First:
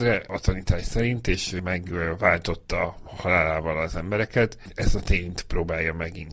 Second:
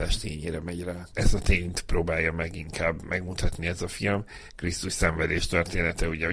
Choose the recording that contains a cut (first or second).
second